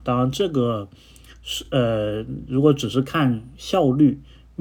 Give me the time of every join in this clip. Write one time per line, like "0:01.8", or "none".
none